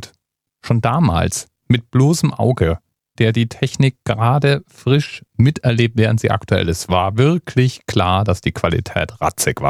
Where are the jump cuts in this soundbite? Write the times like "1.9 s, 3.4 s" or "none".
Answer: 3.2 s

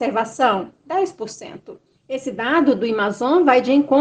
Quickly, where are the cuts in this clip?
2.0 s

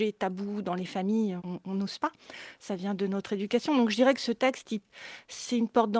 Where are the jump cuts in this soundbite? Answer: 1.4 s

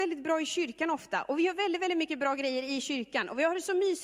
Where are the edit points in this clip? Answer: none

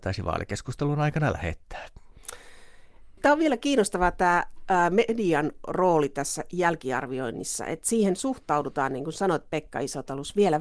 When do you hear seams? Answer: 3.2 s

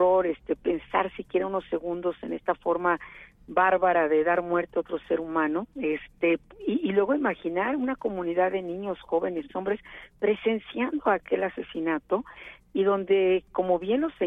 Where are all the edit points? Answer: 5.7 s, 9.5 s

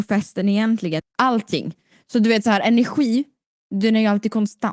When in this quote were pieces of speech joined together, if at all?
1.0 s

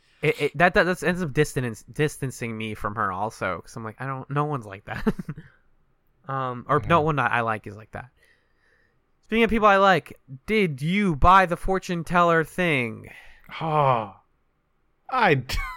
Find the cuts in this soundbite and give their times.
none

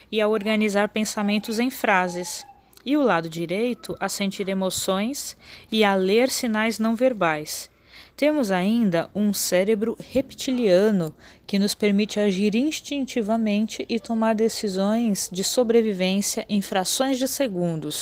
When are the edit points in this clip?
none

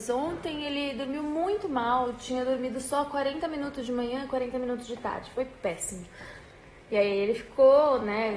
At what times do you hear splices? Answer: none

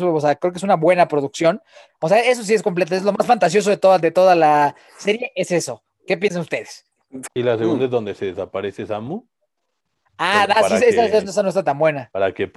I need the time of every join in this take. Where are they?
1.9 s, 7.2 s

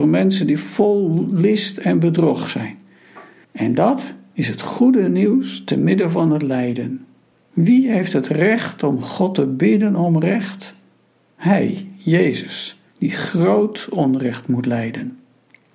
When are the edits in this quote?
3.4 s, 7.4 s, 12.9 s

